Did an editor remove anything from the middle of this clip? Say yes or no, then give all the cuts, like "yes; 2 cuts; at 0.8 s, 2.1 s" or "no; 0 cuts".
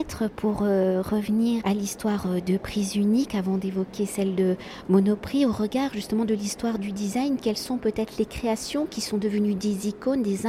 yes; 1 cut; at 1.6 s